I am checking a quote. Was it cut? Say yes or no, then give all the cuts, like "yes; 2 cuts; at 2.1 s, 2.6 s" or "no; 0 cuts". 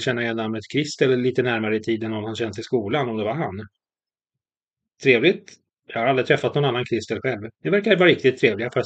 yes; 1 cut; at 7.5 s